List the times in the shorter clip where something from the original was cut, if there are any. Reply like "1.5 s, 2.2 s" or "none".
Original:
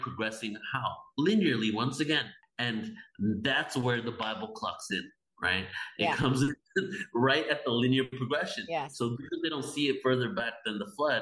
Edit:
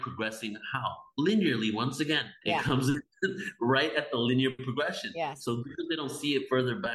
2.4 s